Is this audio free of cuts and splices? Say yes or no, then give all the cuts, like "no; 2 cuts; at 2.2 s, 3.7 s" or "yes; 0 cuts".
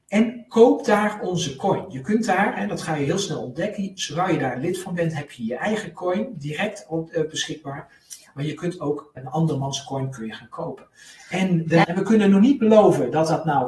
no; 2 cuts; at 9.2 s, 11.8 s